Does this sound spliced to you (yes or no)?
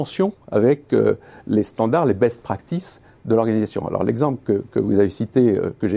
no